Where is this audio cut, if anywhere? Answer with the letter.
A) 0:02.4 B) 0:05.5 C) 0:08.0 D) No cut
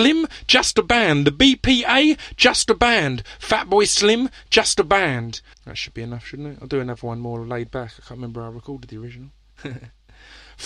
B